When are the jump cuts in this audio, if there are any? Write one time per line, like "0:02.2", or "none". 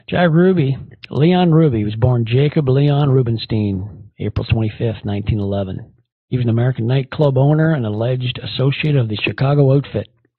0:06.1